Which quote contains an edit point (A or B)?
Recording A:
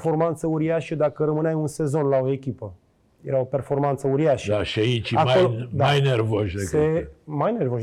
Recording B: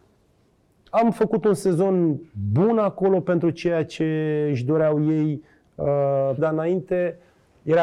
B